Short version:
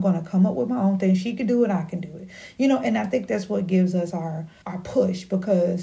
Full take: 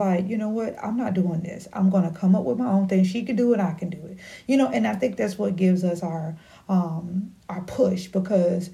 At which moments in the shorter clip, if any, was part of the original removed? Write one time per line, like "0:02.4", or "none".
0:04.6